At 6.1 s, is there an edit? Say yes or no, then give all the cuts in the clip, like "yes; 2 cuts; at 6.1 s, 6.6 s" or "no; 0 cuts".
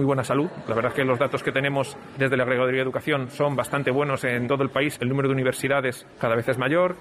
yes; 1 cut; at 6.1 s